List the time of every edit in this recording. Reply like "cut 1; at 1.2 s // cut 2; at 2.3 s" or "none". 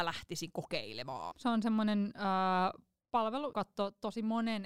cut 1; at 1.3 s // cut 2; at 3.5 s